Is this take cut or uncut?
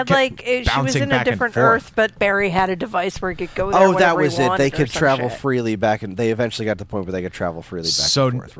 cut